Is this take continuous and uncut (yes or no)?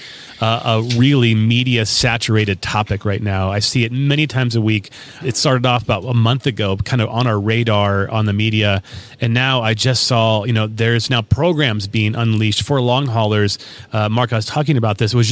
yes